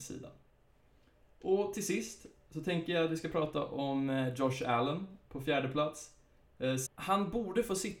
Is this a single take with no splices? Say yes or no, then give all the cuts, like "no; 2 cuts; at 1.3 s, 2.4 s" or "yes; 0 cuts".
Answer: no; 1 cut; at 6.9 s